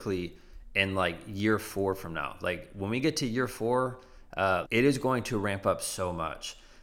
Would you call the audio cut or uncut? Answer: cut